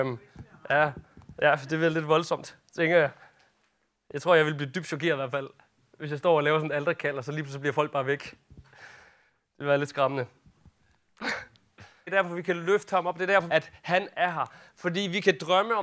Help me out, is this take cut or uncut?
cut